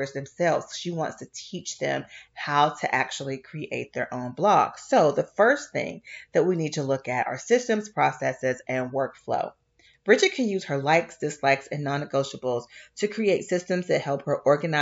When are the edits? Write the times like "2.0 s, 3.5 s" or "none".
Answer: none